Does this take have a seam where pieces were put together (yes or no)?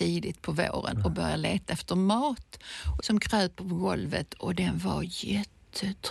yes